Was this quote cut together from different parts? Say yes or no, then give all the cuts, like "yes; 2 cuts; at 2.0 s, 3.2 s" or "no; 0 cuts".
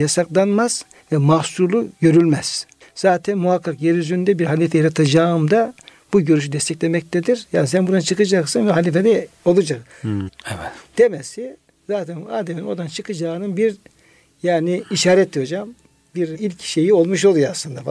yes; 1 cut; at 10.3 s